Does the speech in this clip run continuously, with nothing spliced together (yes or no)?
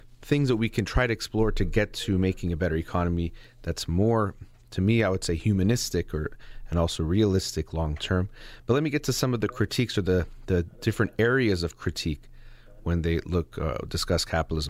yes